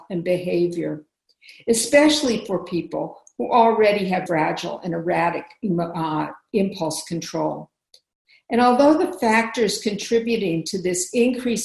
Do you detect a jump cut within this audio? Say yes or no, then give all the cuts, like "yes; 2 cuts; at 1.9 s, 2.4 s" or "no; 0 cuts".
yes; 1 cut; at 4.3 s